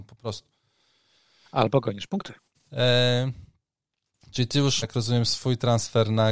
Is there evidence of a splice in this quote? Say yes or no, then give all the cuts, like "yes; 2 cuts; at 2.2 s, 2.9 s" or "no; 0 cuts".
yes; 2 cuts; at 2.7 s, 4.8 s